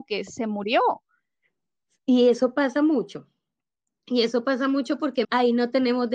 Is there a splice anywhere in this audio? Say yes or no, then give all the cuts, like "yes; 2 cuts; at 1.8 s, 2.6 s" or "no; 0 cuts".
yes; 1 cut; at 5.2 s